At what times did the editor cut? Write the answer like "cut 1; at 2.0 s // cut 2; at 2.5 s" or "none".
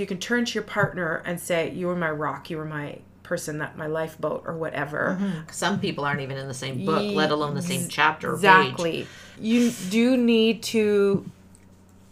cut 1; at 5.5 s // cut 2; at 9.3 s